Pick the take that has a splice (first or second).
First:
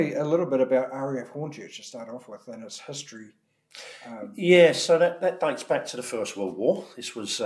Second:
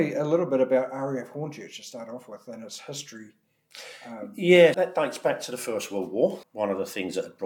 second